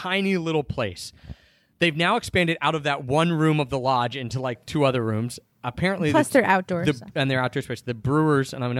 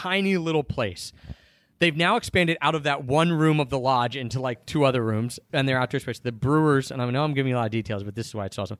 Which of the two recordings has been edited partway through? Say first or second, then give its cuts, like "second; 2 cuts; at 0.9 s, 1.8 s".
second; 1 cut; at 5.5 s